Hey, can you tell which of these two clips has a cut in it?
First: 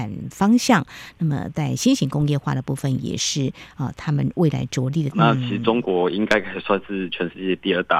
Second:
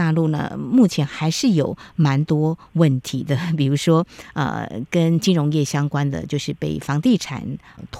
first; 1 cut; at 5.1 s

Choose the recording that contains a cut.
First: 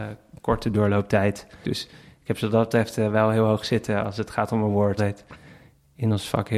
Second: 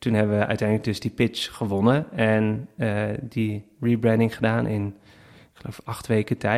first; 2 cuts; at 1.6 s, 5.0 s

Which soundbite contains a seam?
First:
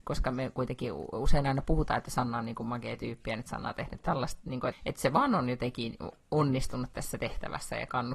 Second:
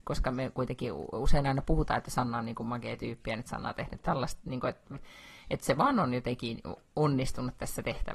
first; 1 cut; at 4.7 s

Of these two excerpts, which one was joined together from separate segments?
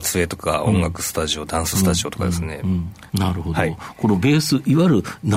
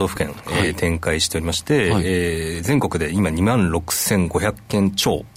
first; 1 cut; at 3.1 s

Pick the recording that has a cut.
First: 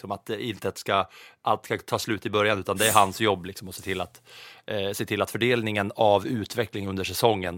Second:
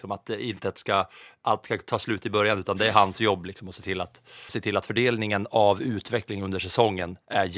second; 1 cut; at 4.5 s

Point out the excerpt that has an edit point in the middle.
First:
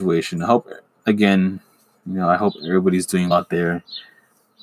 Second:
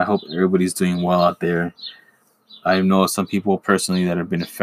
first; 1 cut; at 3.3 s

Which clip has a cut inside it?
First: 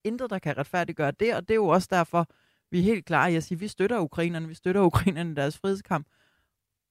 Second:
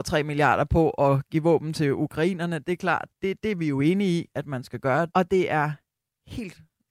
second; 2 cuts; at 3.1 s, 5.1 s

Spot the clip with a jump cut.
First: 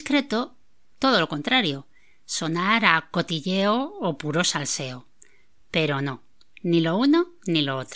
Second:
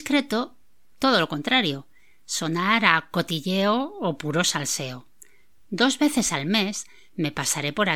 second; 1 cut; at 5.6 s

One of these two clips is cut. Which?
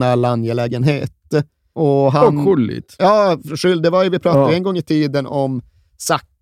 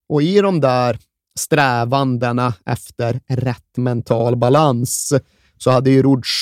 first; 1 cut; at 1.7 s

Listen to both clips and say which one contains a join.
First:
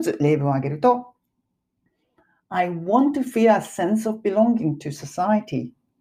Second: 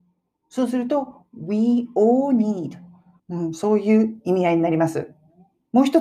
second; 1 cut; at 3.2 s

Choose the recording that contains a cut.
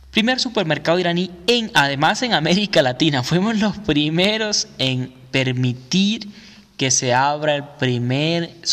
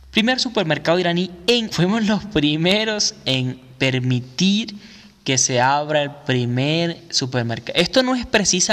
second; 1 cut; at 1.7 s

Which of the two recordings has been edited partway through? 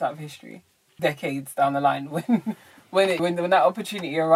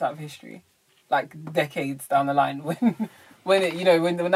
first; 2 cuts; at 1.0 s, 3.2 s

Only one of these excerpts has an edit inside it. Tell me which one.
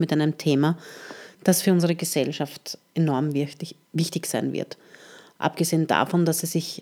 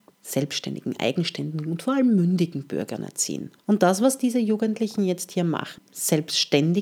second; 2 cuts; at 3.6 s, 5.8 s

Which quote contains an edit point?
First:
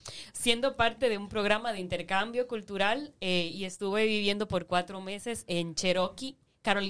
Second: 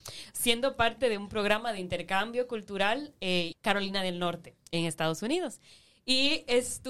second; 1 cut; at 3.5 s

